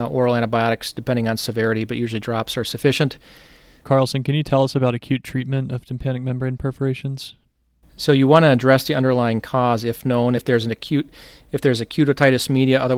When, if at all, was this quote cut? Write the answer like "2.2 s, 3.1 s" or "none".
3.8 s, 10.4 s